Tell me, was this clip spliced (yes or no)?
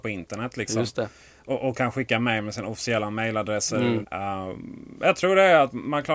yes